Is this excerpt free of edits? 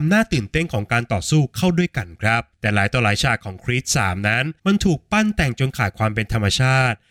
no; 2 cuts; at 2.5 s, 4.6 s

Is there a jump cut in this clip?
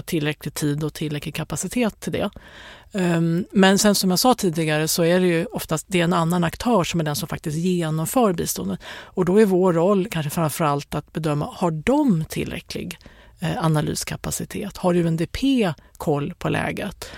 no; 0 cuts

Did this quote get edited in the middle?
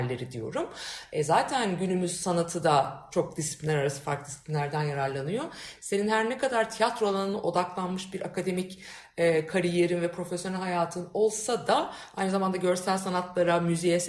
no; 0 cuts

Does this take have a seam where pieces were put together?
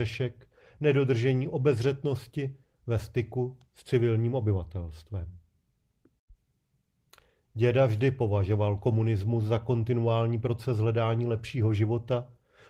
no; 0 cuts

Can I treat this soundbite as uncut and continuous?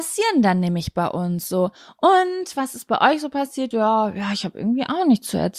no; 1 cut; at 3.7 s

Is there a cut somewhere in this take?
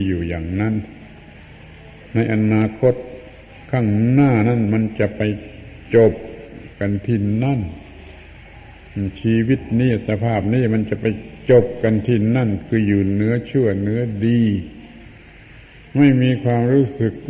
no; 0 cuts

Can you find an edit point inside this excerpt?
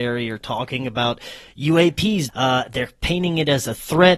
yes; 1 cut; at 2.3 s

